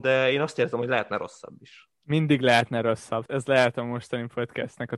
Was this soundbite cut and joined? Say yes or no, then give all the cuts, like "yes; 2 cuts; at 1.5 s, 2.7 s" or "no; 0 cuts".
yes; 2 cuts; at 1.9 s, 3.3 s